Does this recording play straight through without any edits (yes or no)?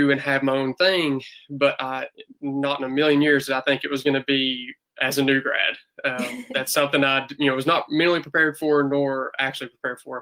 yes